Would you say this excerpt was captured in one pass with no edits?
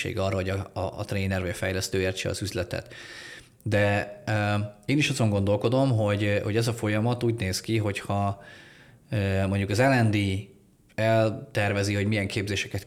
yes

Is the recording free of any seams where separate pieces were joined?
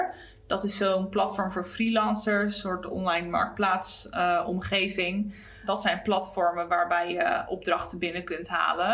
yes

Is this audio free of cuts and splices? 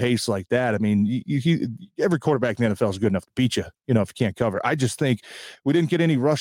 yes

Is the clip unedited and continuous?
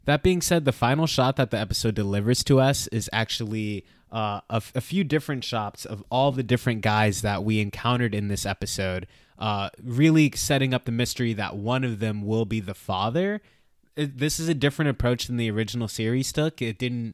yes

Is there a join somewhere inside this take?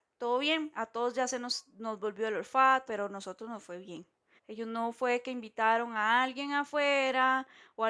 yes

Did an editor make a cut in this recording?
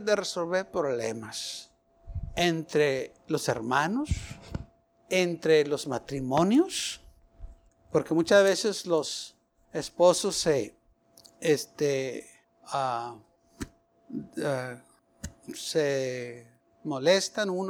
no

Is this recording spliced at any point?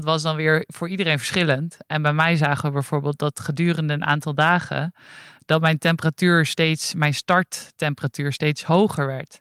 no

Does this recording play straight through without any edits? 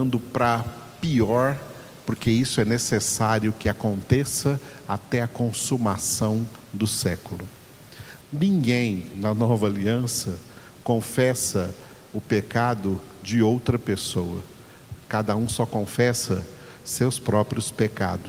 no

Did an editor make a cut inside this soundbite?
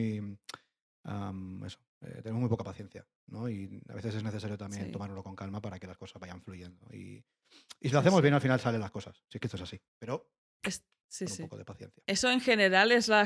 yes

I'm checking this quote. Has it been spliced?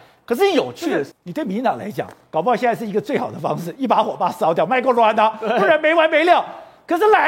yes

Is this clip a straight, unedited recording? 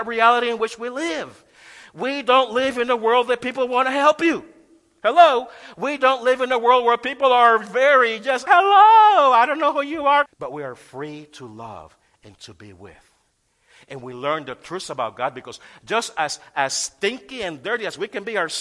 no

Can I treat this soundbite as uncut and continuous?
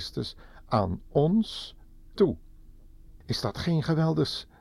no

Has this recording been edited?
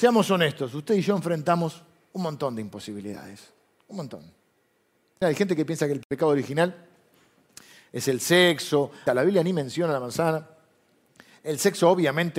yes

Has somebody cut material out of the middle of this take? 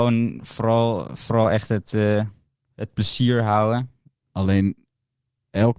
yes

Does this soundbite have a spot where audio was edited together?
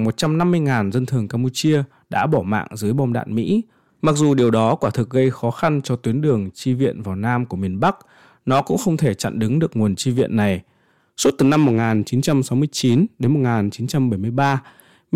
yes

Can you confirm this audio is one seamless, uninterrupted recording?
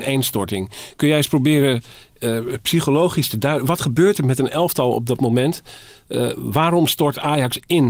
yes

